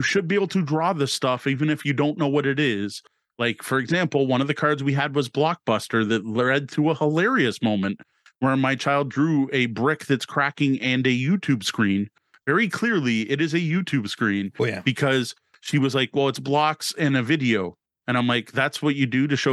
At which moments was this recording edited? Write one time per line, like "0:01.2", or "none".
none